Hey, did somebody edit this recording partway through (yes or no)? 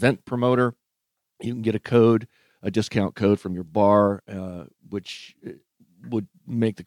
no